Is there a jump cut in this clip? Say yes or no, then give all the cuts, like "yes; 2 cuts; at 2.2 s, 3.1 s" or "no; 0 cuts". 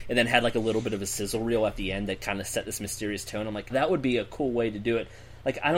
yes; 1 cut; at 3.7 s